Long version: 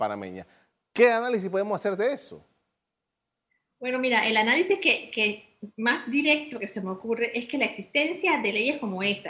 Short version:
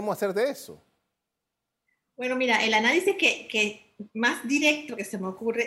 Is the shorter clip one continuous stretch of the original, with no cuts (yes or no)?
yes